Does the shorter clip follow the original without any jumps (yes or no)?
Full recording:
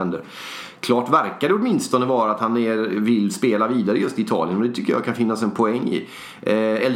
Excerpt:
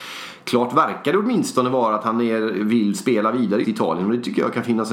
no